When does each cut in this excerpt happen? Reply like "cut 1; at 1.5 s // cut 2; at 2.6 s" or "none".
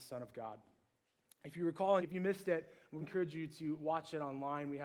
cut 1; at 2.0 s // cut 2; at 3.0 s

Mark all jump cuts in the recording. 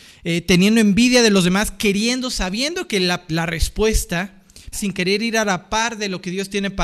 cut 1; at 3.3 s // cut 2; at 4.7 s

